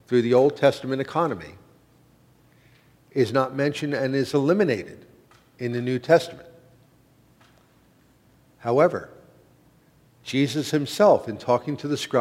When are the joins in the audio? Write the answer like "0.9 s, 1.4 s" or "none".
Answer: none